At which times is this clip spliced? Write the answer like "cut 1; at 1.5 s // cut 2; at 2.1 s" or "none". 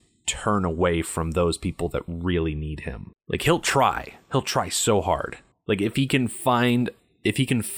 none